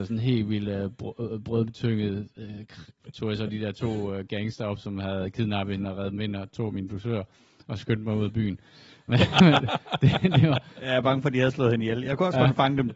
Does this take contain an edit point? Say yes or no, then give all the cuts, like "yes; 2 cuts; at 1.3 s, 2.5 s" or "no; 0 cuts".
no; 0 cuts